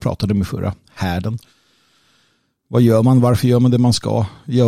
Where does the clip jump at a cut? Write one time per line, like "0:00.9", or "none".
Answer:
none